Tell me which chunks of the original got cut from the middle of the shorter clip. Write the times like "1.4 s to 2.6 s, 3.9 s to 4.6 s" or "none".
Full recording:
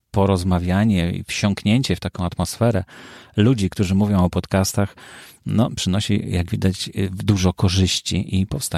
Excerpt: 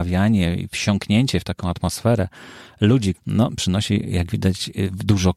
3.7 s to 5.3 s